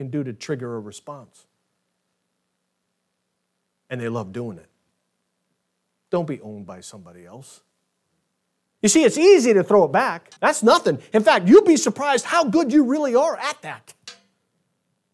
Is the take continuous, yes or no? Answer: no